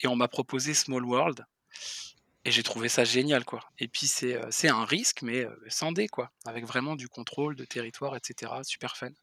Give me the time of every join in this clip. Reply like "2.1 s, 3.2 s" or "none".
3.7 s